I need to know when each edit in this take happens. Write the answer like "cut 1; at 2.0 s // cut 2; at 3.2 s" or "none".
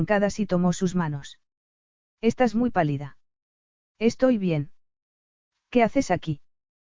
none